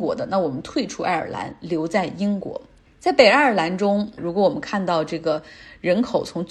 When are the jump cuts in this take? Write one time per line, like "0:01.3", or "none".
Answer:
0:04.2